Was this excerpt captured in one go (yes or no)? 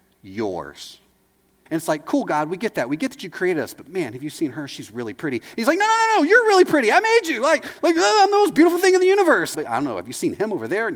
no